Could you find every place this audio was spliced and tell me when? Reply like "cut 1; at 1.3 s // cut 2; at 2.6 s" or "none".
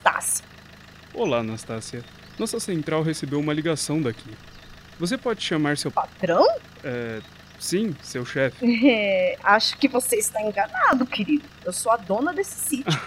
cut 1; at 5.9 s // cut 2; at 11.5 s

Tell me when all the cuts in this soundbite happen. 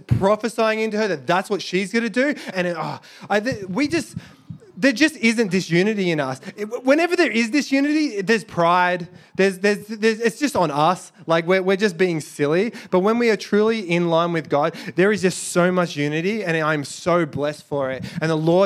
cut 1; at 2.5 s

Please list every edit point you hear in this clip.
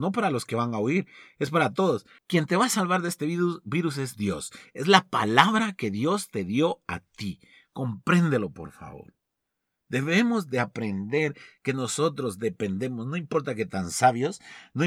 cut 1; at 2.2 s

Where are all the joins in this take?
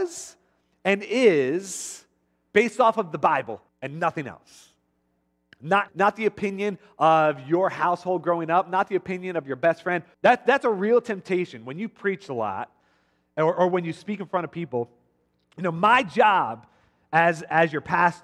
cut 1; at 3.7 s // cut 2; at 5.9 s // cut 3; at 10.1 s

